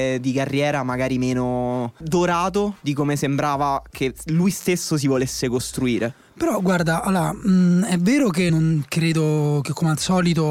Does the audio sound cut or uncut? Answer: cut